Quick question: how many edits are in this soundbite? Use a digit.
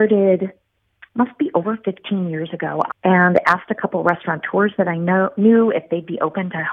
1